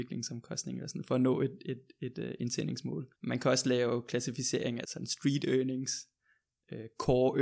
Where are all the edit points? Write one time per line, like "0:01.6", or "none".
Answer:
0:03.1
0:04.8